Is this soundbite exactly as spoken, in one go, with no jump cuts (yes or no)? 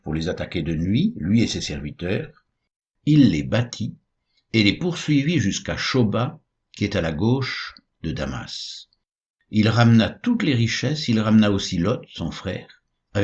yes